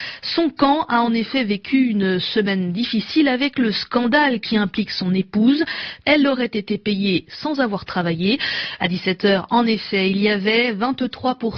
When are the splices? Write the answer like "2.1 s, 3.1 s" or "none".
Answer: 6.0 s, 8.8 s